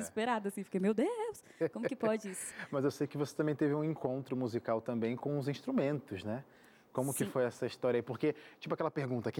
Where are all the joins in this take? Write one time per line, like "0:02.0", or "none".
none